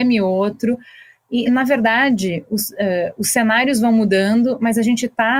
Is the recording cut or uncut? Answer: uncut